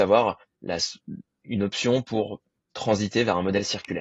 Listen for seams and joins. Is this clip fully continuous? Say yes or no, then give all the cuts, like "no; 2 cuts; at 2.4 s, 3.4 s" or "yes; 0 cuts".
yes; 0 cuts